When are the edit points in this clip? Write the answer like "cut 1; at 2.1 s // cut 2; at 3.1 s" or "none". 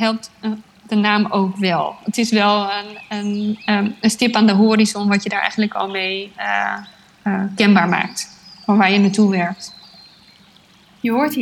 none